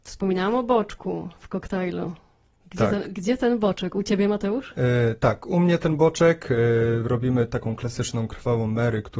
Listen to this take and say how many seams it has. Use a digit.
0